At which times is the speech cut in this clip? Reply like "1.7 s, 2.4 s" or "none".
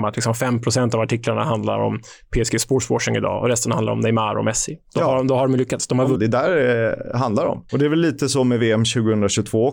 6.2 s, 7.7 s